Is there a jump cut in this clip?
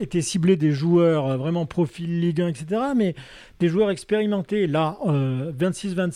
no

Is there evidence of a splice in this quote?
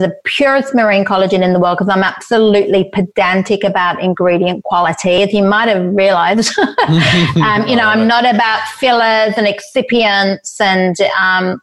no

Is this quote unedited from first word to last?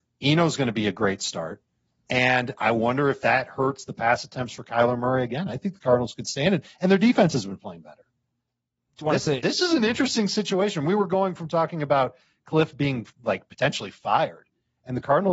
yes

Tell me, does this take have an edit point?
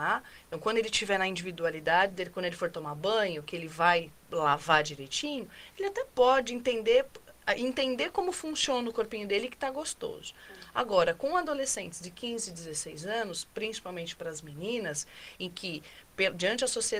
no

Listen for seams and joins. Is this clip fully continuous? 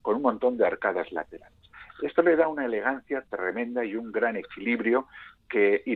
yes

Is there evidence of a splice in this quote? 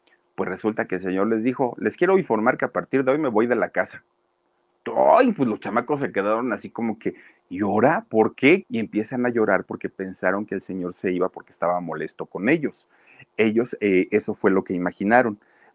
yes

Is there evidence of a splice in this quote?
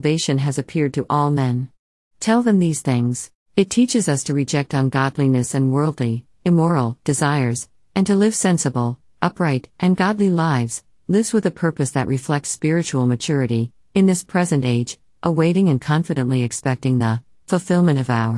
yes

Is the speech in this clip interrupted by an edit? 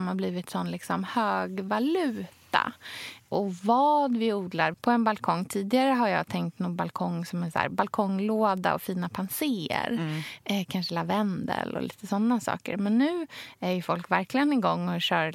yes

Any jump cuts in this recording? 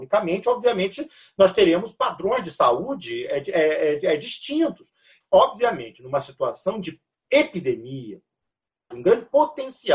yes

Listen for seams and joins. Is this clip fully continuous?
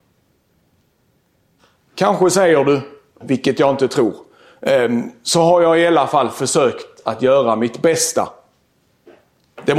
no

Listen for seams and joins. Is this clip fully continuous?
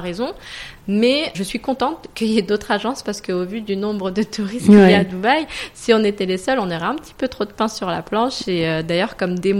no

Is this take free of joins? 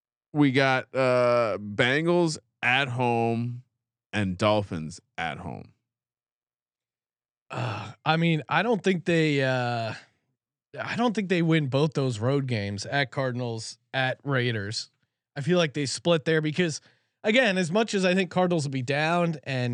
yes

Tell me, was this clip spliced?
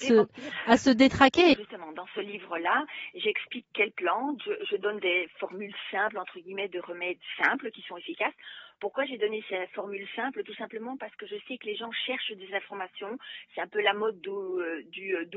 yes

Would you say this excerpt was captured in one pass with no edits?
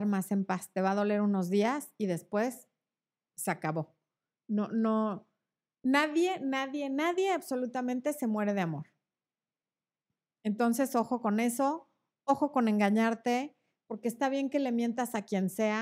yes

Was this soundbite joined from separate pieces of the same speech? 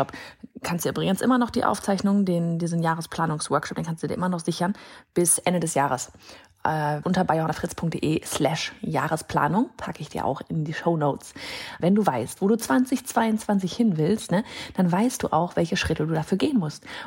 yes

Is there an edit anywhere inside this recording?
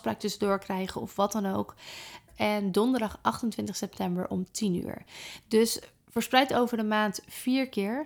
yes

